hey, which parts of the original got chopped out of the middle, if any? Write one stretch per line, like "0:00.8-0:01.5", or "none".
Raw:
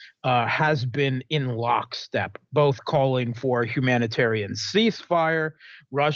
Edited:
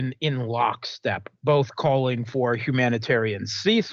none